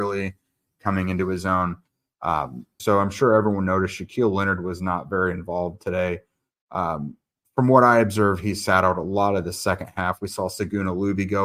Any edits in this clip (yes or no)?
yes